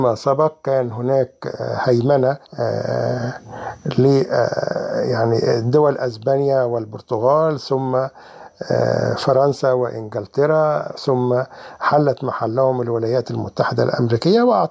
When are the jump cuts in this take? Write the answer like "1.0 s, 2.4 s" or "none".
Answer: 2.4 s